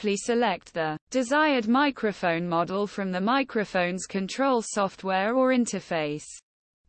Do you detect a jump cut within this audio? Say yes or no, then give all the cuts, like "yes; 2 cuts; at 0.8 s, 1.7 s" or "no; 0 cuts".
yes; 1 cut; at 1.0 s